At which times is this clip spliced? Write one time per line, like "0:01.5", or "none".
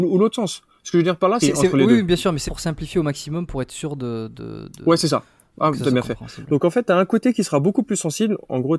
0:01.4
0:02.5